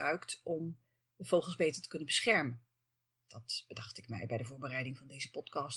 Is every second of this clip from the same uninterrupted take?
no; 1 cut; at 3.3 s

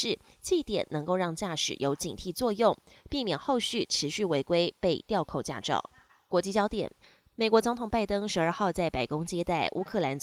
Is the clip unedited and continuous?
yes; 0 cuts

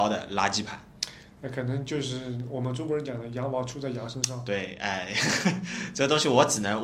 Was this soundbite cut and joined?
no; 0 cuts

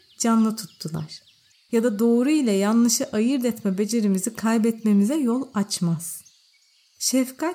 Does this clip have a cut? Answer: yes; 1 cut; at 1.5 s

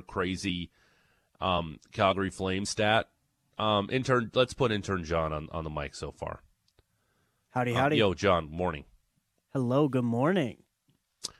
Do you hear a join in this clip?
no; 0 cuts

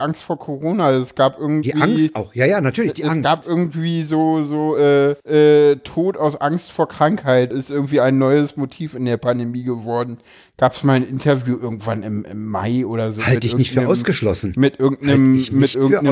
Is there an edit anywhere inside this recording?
yes; 2 cuts; at 5.2 s, 7.5 s

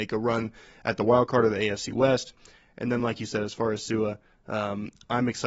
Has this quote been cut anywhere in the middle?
no; 0 cuts

